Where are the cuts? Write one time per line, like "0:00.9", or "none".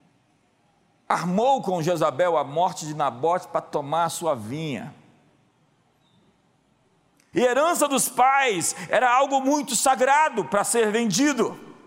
0:07.3

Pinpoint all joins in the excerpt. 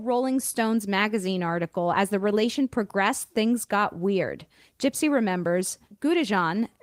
none

